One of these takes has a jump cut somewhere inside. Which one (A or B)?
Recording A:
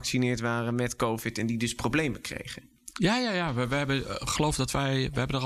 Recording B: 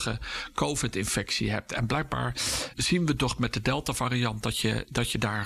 B